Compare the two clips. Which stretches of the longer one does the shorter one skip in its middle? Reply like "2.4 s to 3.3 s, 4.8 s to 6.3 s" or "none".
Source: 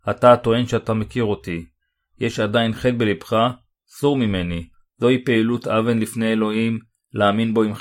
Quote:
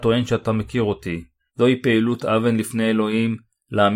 1.9 s to 4.9 s